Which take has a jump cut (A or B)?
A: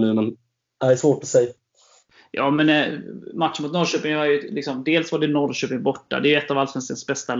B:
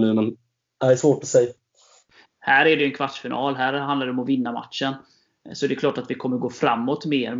B